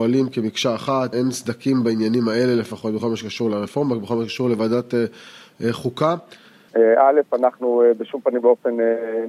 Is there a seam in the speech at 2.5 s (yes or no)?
no